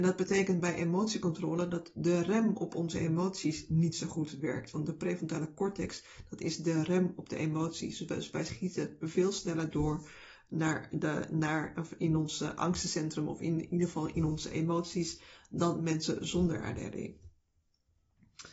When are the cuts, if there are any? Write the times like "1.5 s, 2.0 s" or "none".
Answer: none